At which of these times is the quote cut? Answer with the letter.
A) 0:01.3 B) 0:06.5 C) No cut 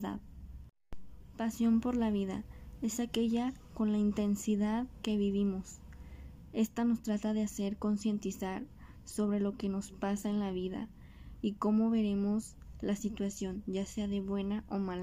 C